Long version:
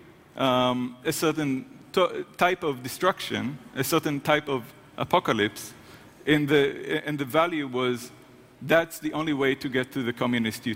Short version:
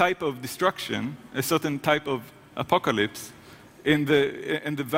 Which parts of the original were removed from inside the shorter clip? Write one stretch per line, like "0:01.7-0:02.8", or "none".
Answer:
none